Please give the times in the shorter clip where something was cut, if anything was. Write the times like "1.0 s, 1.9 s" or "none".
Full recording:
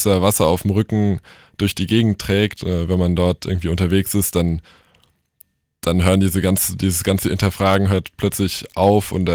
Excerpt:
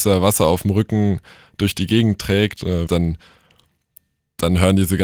2.9 s